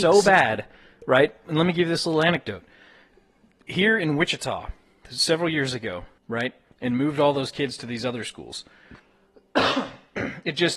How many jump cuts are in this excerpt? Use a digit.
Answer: 2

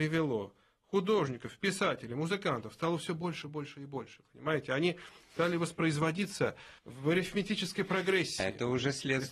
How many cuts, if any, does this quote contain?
2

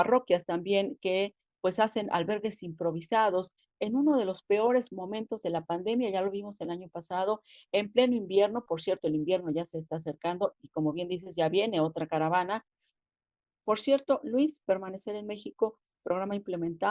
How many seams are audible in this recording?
1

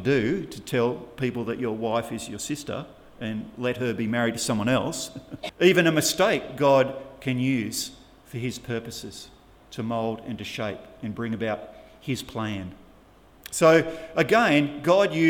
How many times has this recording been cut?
2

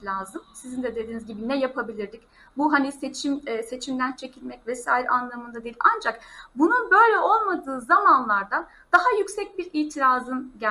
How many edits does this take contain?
0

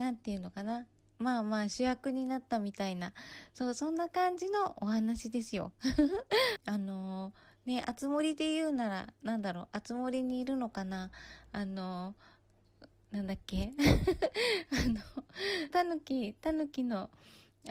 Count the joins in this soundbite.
2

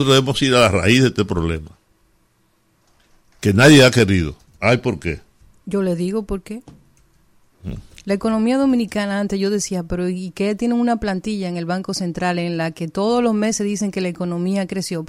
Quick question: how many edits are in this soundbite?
1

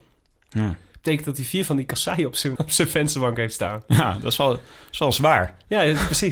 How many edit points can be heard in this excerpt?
1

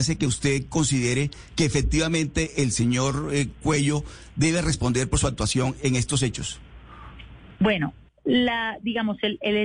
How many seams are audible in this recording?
1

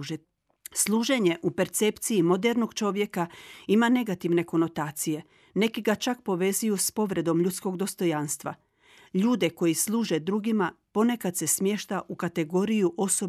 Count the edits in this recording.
0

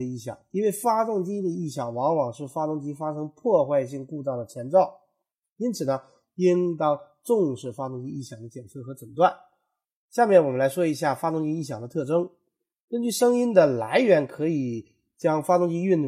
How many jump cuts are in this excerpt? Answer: 0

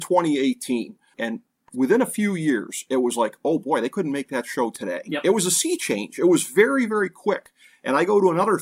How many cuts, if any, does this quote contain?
1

